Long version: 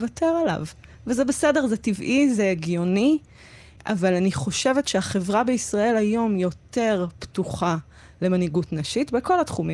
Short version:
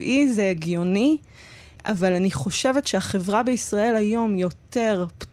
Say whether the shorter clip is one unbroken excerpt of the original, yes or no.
yes